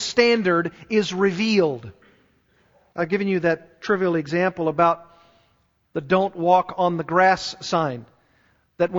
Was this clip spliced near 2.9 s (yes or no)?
yes